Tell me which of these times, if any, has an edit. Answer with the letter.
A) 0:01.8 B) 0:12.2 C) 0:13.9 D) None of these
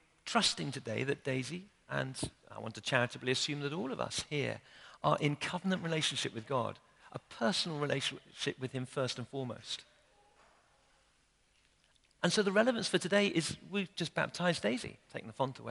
B